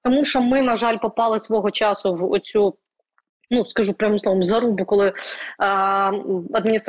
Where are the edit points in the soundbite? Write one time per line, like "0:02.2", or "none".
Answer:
none

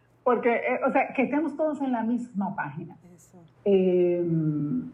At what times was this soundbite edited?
0:03.5

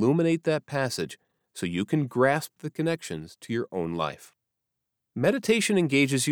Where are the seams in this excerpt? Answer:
none

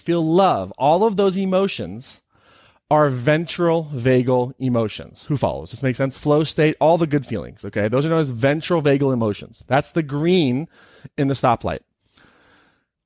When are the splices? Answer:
none

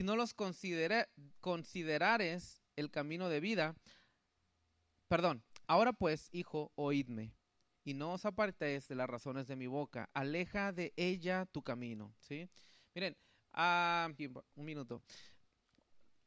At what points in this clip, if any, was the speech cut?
0:05.6
0:14.2

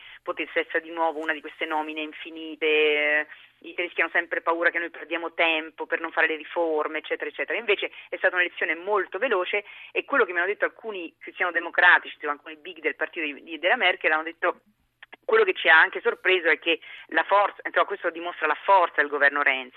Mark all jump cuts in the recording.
none

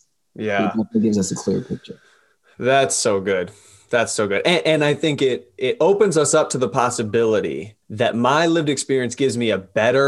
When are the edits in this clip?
0:07.8

